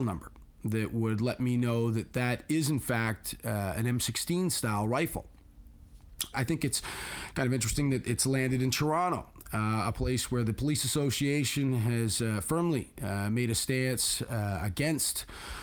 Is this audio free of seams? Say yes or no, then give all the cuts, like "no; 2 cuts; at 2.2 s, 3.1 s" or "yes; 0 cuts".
no; 1 cut; at 6.3 s